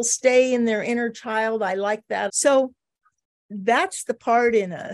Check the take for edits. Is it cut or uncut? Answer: cut